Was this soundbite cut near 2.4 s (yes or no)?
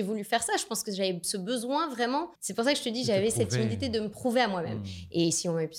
yes